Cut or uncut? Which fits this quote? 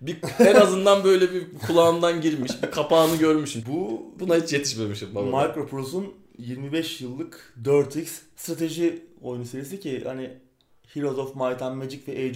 cut